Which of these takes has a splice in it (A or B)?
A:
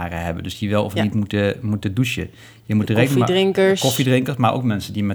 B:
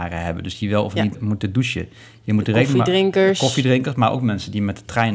B